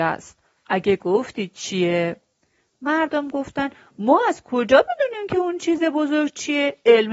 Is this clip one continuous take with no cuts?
yes; 0 cuts

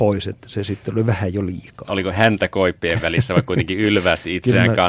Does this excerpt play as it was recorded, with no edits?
yes; 0 cuts

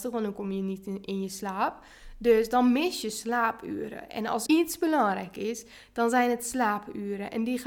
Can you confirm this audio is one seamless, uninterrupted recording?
no; 1 cut; at 4.5 s

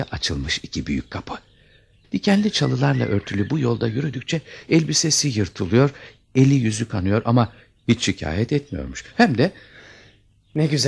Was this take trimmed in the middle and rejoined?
yes; 1 cut; at 2.0 s

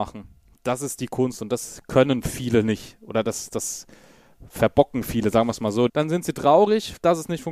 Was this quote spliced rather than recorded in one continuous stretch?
yes; 1 cut; at 5.9 s

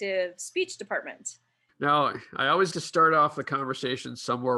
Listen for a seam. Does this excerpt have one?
yes; 2 cuts; at 1.7 s, 2.7 s

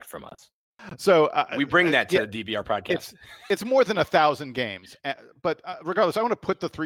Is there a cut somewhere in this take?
no; 0 cuts

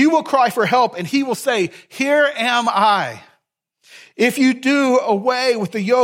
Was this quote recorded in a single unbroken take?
yes; 0 cuts

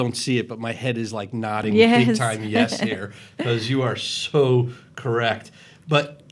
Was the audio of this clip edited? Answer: no; 0 cuts

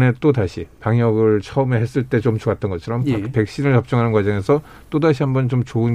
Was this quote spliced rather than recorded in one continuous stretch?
no; 0 cuts

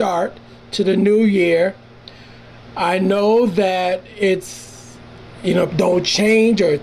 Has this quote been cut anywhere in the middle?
yes; 1 cut; at 5.7 s

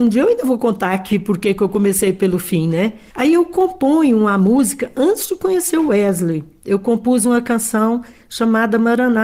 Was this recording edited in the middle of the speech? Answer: yes; 1 cut; at 3.1 s

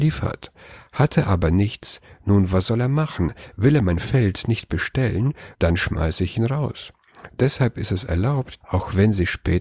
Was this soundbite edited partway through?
yes; 2 cuts; at 5.5 s, 8.6 s

